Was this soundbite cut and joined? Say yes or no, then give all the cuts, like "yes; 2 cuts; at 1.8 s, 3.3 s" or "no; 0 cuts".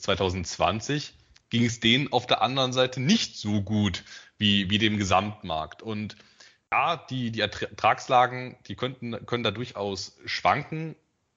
no; 0 cuts